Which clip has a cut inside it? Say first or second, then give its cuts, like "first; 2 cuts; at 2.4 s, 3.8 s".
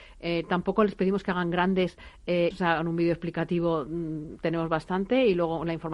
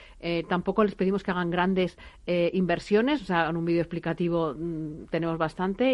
first; 1 cut; at 2.5 s